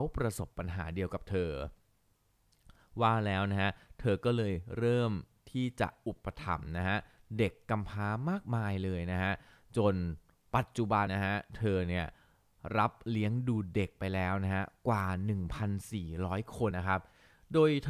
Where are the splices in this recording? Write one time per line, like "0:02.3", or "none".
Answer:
0:11.1
0:16.7